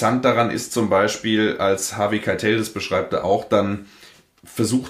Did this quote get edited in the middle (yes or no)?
no